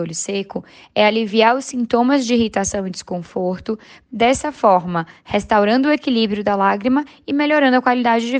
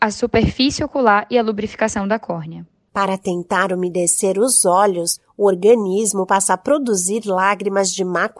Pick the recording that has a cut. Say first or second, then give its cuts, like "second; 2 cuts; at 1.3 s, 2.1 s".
first; 1 cut; at 4.1 s